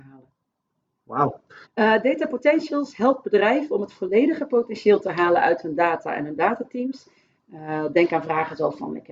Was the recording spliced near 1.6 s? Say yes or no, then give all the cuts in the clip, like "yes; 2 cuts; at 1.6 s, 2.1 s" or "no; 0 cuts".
yes; 2 cuts; at 1.6 s, 7.4 s